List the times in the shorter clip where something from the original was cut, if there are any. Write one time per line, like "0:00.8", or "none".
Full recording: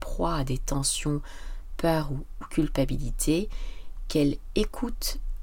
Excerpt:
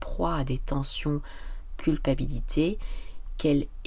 0:01.8